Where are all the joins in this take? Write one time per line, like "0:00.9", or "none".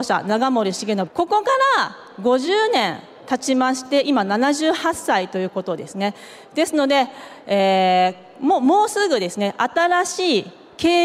0:01.1